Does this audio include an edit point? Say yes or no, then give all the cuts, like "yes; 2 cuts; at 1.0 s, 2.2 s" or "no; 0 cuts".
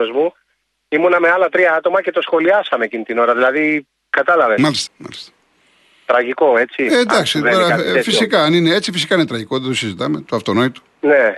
yes; 1 cut; at 4.9 s